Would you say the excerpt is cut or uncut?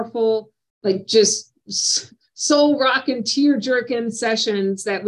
uncut